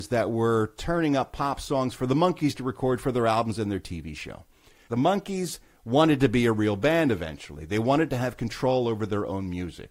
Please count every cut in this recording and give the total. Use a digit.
1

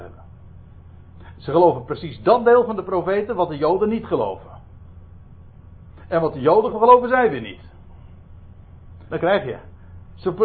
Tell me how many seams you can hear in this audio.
2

